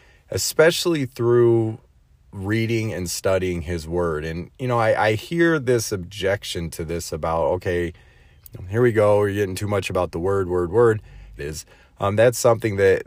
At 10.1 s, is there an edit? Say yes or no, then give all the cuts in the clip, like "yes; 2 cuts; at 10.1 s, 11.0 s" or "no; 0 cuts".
no; 1 cut; at 11.4 s